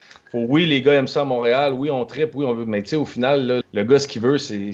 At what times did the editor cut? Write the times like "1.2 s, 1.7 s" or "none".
3.6 s